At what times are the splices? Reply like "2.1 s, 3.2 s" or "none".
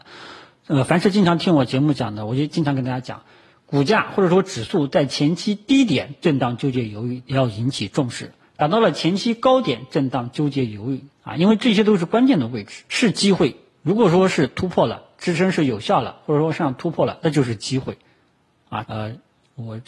11.1 s, 12.9 s, 18.8 s

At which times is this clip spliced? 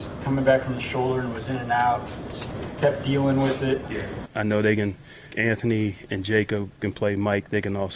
4.3 s, 5.3 s

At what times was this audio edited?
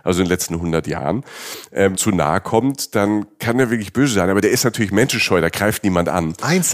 1.9 s

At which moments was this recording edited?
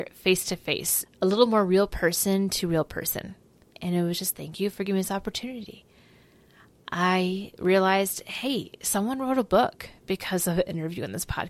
1.1 s, 3.8 s

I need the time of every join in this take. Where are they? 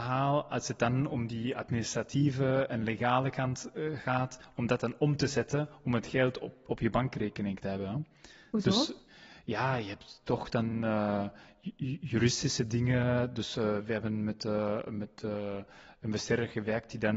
none

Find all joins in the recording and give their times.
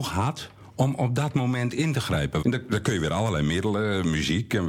2.4 s

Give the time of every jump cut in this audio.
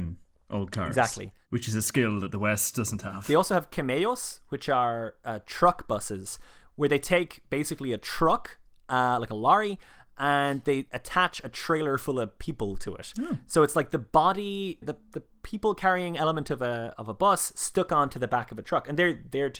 14.8 s, 17.0 s

